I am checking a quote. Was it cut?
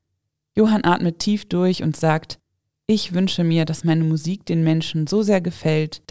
no; 0 cuts

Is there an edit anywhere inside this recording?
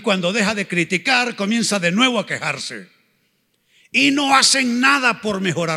no; 0 cuts

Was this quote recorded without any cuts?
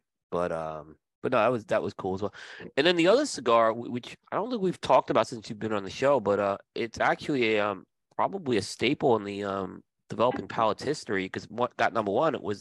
yes; 0 cuts

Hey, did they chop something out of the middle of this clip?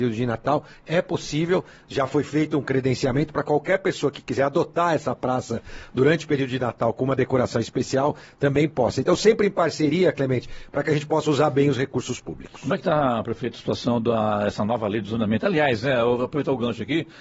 no; 0 cuts

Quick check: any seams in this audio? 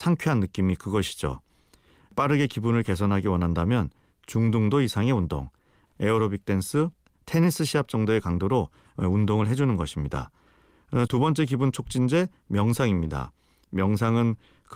yes; 2 cuts; at 5.9 s, 11.1 s

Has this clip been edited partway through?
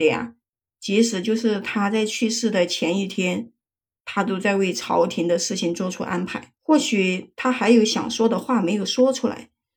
yes; 1 cut; at 6.6 s

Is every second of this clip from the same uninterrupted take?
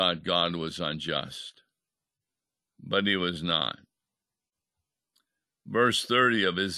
yes; 0 cuts

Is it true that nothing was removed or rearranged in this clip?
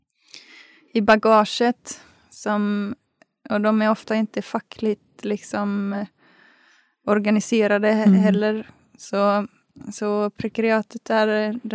yes; 0 cuts

